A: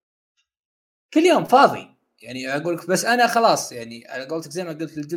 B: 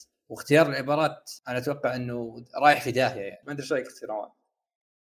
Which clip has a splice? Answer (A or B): B